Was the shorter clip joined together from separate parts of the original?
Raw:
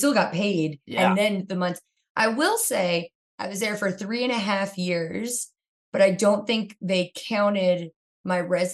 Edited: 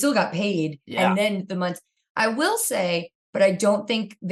yes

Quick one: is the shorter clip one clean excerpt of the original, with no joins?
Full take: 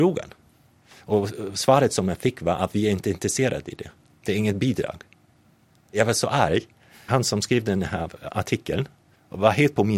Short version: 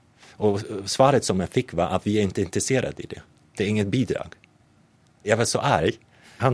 yes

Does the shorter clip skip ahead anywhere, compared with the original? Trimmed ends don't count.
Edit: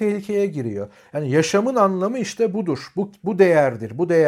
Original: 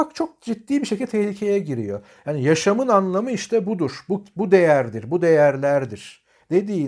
no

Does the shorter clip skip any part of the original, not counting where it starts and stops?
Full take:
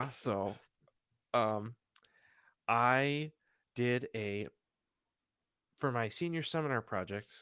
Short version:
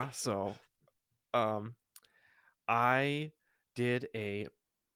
no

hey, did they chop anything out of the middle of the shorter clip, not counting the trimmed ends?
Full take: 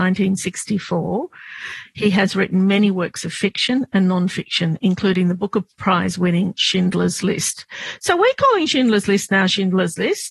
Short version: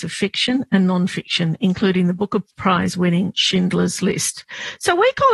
no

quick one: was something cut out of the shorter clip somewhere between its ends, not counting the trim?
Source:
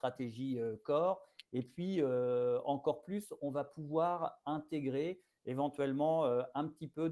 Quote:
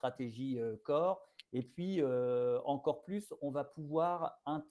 no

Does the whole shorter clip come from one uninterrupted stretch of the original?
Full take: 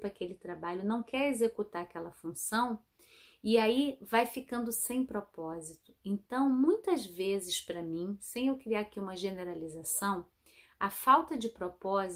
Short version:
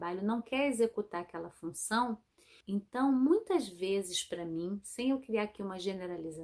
no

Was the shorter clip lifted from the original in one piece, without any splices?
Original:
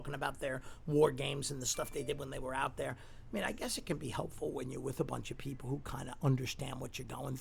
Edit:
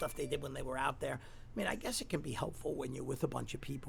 yes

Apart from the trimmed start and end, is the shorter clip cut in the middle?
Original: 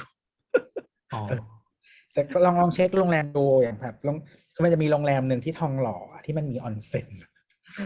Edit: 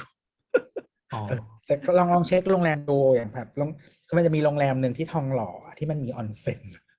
yes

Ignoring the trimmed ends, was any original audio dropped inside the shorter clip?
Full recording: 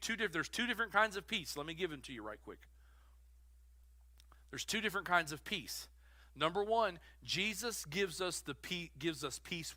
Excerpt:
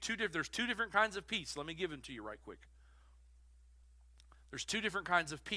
no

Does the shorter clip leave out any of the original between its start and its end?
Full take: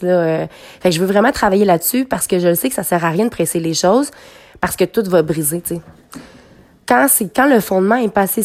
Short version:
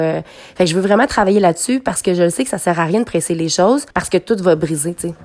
yes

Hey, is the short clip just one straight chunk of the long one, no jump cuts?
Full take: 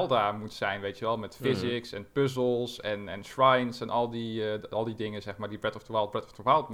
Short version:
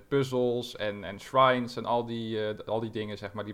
yes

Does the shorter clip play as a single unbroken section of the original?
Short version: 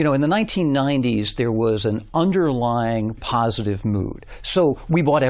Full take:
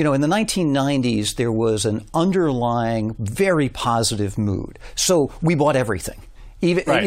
no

